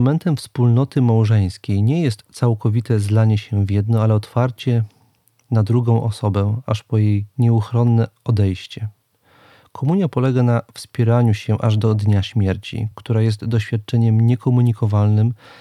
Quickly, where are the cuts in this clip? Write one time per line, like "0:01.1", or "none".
none